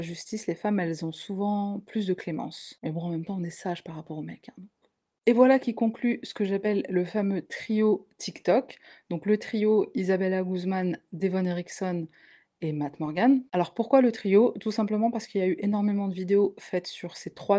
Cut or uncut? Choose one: uncut